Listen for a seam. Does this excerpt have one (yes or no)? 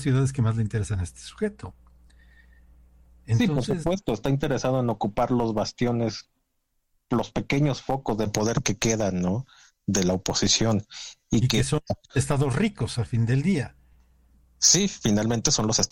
no